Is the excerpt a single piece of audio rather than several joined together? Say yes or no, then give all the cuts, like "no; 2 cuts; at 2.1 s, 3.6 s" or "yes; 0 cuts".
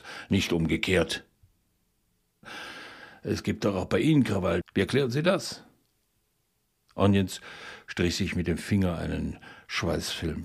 no; 2 cuts; at 2.4 s, 4.6 s